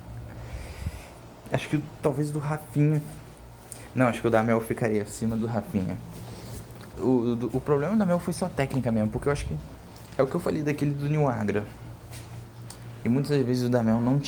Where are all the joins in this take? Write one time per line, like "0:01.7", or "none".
0:06.9
0:13.0